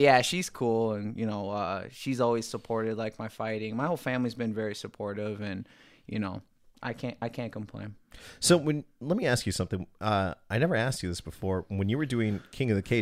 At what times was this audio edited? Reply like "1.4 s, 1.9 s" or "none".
none